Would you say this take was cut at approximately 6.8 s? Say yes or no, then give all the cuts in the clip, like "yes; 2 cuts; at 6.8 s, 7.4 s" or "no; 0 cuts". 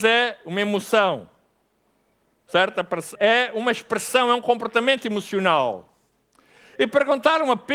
no; 1 cut; at 3.2 s